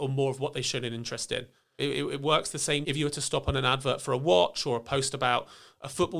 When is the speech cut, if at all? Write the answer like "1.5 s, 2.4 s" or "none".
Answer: 1.8 s, 2.8 s